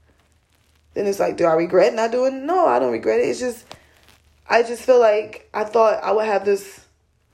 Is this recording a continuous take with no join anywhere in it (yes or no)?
yes